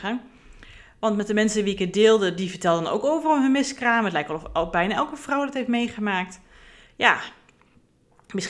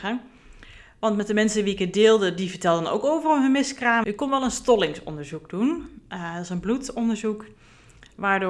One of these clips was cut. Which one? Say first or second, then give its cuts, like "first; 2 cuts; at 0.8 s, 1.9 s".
second; 1 cut; at 4.0 s